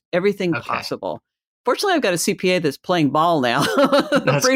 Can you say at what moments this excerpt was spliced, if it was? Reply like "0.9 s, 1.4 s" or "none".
none